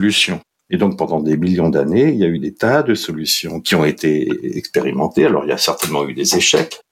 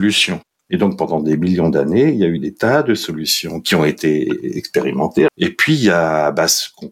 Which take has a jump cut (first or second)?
second